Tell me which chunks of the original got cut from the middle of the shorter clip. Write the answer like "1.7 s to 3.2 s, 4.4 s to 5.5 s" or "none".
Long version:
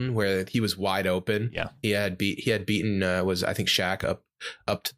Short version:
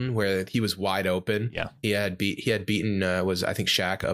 none